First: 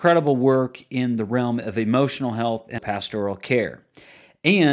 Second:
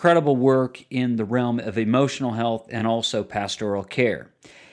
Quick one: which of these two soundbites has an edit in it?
first; 1 cut; at 2.8 s

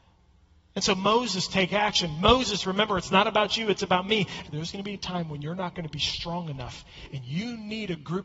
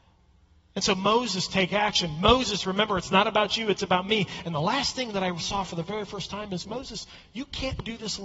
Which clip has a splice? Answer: first; 1 cut; at 4.4 s

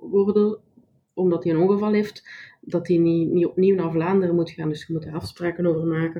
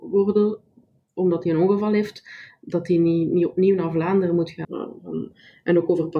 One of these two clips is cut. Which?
second; 1 cut; at 4.6 s

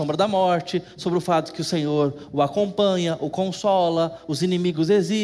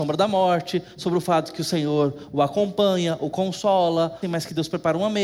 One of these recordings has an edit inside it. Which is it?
second; 1 cut; at 4.2 s

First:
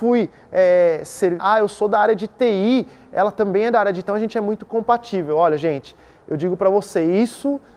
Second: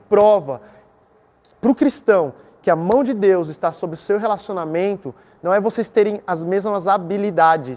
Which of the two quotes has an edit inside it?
first; 2 cuts; at 1.4 s, 4.1 s

